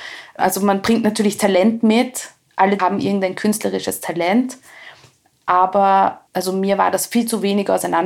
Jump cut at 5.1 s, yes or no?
no